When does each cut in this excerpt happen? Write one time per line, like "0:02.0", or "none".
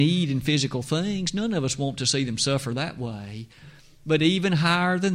none